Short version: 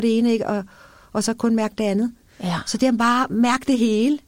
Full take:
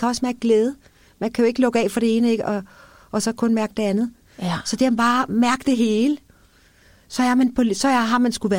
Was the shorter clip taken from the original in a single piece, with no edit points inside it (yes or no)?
yes